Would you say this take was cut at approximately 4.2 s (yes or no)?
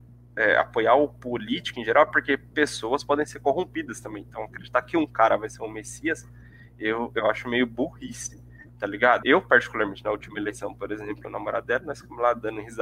no